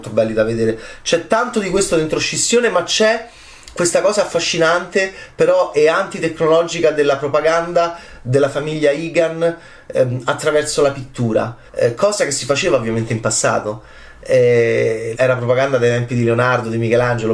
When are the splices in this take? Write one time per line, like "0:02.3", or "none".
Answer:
0:11.7
0:15.1